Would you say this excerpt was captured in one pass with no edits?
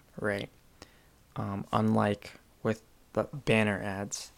no; 1 cut; at 3.3 s

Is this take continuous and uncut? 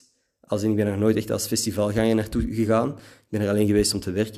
yes; 0 cuts

